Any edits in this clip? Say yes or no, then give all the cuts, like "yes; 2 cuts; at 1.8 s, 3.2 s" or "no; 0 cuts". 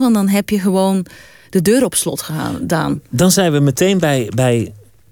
no; 0 cuts